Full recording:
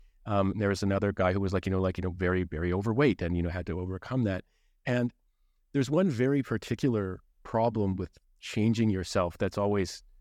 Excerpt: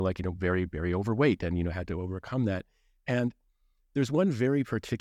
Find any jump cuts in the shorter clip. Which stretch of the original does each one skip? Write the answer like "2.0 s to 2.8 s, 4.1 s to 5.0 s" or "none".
none